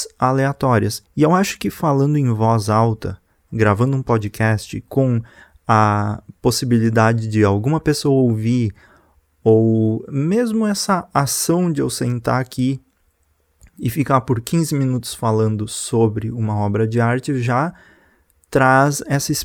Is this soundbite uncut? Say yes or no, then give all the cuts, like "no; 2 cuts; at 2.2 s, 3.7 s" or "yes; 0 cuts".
no; 1 cut; at 1.0 s